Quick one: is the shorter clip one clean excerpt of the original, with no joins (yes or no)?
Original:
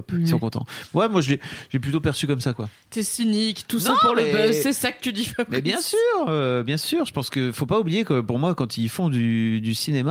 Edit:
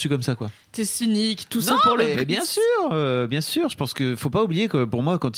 no